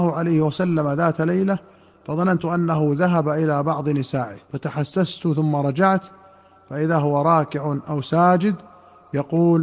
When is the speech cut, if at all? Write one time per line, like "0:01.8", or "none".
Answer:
0:04.4